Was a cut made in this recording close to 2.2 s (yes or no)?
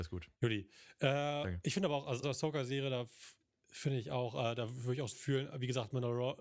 yes